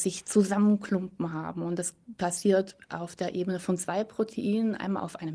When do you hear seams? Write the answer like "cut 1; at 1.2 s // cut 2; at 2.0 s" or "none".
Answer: none